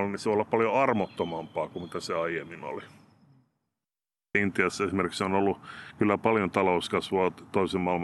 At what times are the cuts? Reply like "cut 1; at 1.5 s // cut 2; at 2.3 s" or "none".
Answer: none